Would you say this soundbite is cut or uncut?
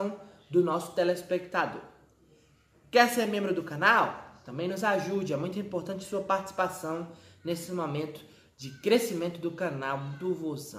uncut